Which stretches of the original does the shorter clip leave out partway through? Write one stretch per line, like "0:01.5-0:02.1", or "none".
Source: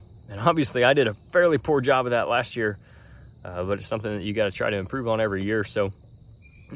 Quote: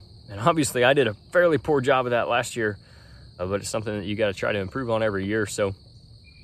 0:03.4-0:03.6